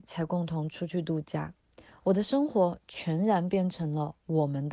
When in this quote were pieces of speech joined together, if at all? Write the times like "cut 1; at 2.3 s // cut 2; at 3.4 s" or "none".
none